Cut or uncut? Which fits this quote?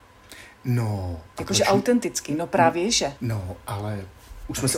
cut